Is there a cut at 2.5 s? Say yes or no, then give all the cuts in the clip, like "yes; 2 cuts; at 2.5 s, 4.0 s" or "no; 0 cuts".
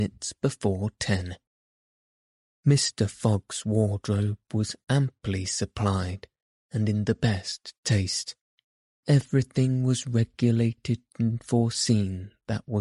yes; 2 cuts; at 2.5 s, 9.0 s